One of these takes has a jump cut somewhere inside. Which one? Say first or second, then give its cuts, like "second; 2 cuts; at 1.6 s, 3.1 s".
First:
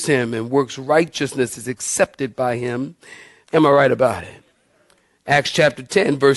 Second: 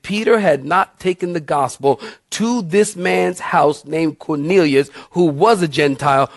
first; 1 cut; at 3.4 s